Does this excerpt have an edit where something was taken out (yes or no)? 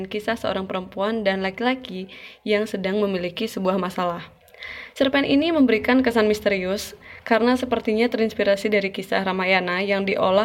no